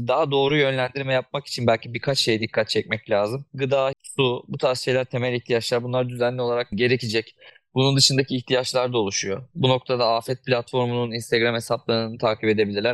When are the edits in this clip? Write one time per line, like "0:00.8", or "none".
0:03.9